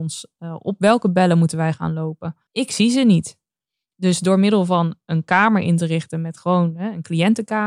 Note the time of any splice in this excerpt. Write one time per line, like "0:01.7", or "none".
0:02.5

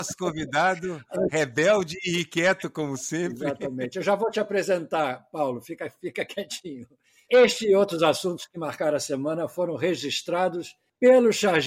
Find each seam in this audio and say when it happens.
none

